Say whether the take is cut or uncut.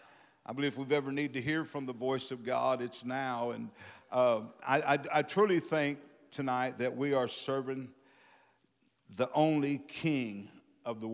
uncut